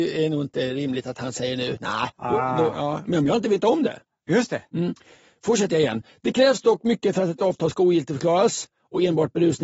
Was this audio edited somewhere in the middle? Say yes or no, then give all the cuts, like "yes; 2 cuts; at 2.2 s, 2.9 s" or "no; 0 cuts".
no; 0 cuts